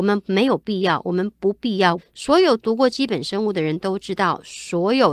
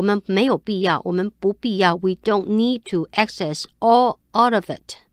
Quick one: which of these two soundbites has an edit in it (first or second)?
first